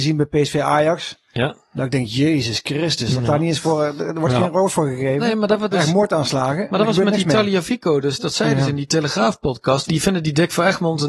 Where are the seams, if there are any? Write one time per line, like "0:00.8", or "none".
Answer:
0:05.7
0:09.8